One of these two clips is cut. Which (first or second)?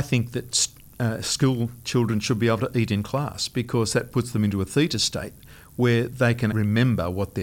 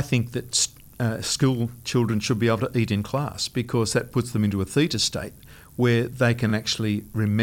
first